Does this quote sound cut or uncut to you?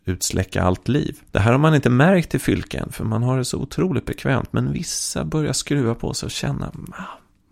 cut